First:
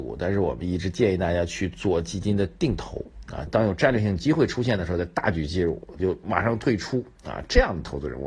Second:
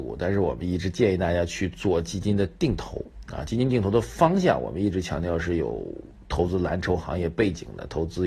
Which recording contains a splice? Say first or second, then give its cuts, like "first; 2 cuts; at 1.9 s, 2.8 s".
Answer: first; 2 cuts; at 3.5 s, 6.0 s